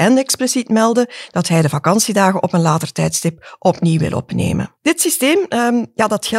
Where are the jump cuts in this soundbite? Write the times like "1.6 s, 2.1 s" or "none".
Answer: 4.8 s